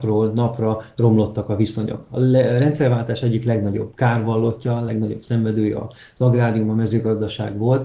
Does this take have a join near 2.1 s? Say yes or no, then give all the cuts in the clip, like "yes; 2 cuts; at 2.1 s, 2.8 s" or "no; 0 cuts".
no; 0 cuts